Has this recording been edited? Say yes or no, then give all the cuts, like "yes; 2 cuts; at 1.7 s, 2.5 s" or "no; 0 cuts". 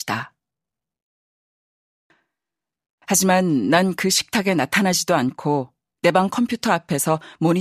no; 0 cuts